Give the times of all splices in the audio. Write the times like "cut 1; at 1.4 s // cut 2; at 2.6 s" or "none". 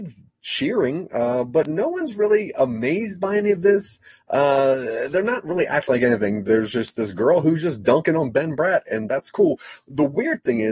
none